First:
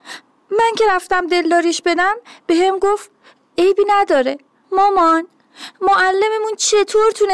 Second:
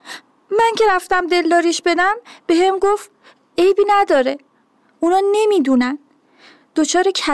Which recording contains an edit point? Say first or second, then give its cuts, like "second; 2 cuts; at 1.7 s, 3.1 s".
first; 1 cut; at 4.6 s